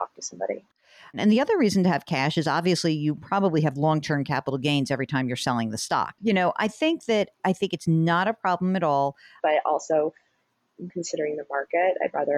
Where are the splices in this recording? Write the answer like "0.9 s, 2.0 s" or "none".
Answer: 6.2 s, 9.4 s, 10.9 s